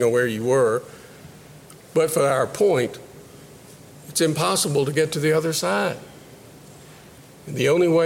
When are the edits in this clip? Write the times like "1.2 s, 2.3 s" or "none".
none